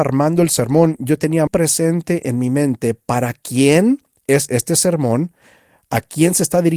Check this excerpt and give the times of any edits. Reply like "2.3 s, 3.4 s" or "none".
1.5 s